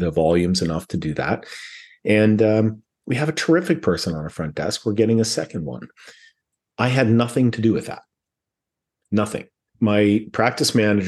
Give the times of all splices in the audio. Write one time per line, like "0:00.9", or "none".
none